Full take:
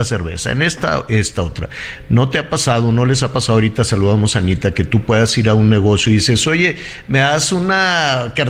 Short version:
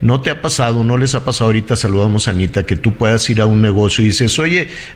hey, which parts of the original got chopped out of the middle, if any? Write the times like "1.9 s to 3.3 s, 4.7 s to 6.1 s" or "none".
none